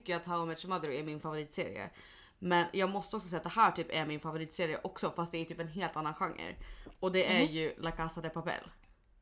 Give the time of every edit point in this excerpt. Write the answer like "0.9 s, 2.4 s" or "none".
none